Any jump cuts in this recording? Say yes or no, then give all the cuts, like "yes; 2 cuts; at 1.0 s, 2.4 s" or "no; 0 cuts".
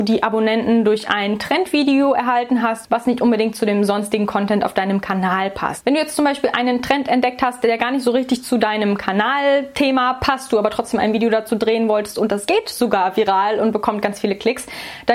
no; 0 cuts